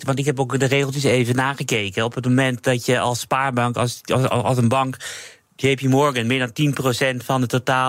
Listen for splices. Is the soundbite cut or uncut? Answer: uncut